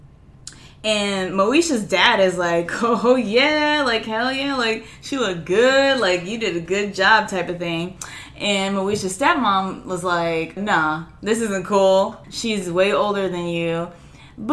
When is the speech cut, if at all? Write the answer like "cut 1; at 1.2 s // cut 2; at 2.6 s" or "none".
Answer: cut 1; at 10.6 s // cut 2; at 12.2 s